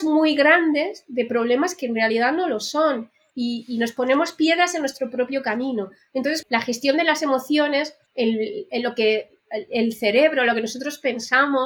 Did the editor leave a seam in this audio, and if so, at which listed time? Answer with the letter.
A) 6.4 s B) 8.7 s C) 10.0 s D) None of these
A